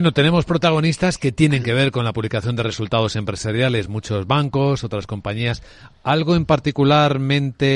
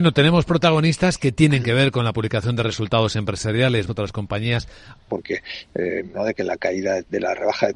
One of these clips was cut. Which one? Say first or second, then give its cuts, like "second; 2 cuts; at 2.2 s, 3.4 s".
second; 3 cuts; at 3.9 s, 5.1 s, 6.1 s